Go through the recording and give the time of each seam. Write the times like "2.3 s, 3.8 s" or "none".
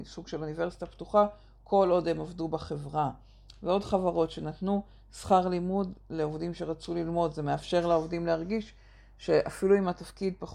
none